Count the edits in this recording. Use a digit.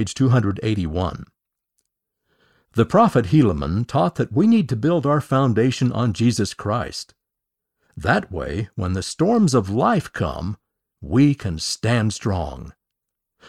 0